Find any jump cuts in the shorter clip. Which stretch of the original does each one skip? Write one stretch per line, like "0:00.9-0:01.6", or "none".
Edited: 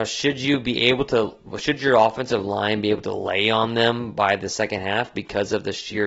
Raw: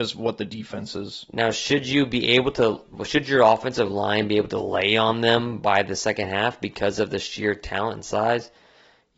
none

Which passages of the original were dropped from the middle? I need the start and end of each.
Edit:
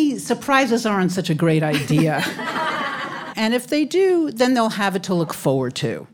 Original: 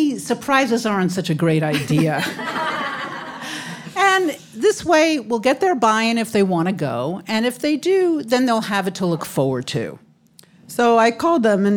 0:03.3-0:07.2

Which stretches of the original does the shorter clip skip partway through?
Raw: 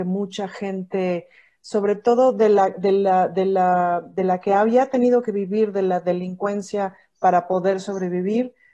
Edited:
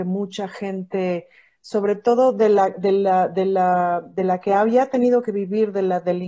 none

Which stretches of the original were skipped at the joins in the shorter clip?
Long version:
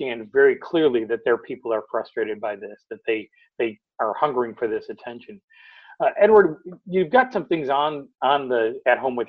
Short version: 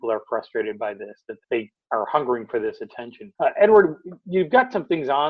0:03.0-0:03.5
0:05.4-0:06.0

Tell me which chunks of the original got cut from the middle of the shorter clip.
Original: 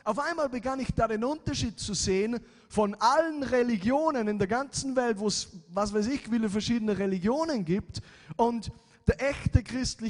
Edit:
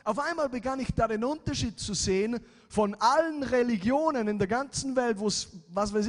none

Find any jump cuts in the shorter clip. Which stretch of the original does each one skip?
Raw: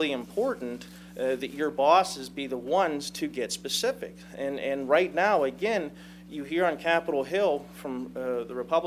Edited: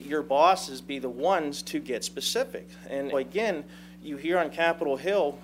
0:04.6-0:05.4

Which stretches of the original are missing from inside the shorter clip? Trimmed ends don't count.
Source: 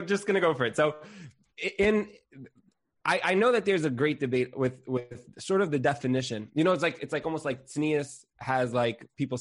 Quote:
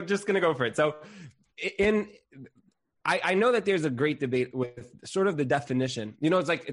0:04.5-0:04.8

